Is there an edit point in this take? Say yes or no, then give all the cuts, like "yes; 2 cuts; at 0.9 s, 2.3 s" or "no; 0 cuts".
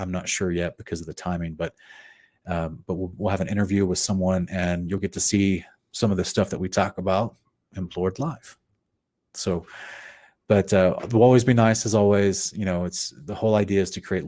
no; 0 cuts